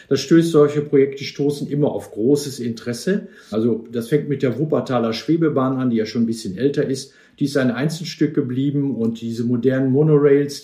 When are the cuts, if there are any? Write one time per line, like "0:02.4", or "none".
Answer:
0:03.5